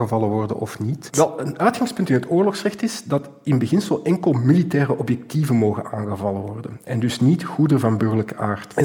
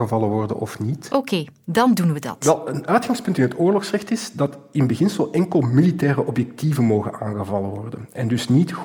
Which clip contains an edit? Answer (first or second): first